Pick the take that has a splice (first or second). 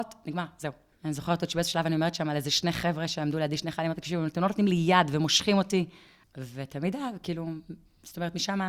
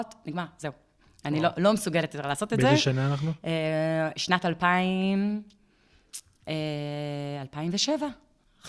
first